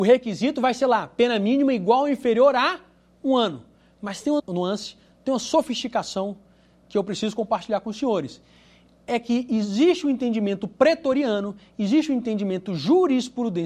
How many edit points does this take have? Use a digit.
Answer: 1